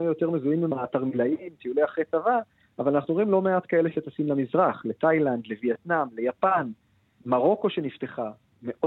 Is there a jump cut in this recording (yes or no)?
no